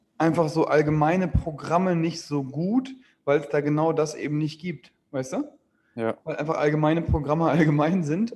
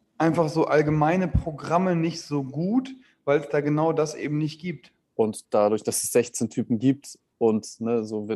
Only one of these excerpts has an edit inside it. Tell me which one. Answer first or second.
second